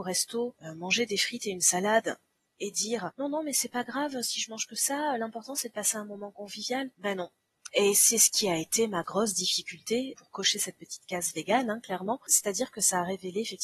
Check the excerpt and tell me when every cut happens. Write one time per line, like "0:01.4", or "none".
0:07.7
0:09.0
0:10.1